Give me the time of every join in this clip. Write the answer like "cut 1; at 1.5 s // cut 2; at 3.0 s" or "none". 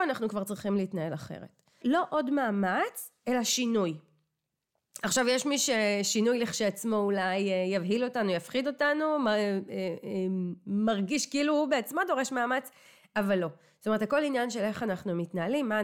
cut 1; at 1.8 s